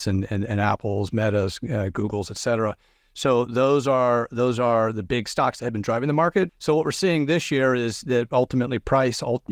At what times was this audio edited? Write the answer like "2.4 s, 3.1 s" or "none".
6.5 s